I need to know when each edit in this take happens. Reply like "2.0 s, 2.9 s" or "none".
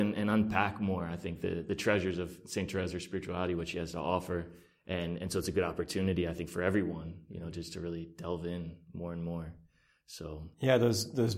none